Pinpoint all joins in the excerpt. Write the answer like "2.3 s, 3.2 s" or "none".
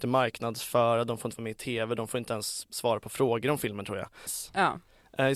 4.3 s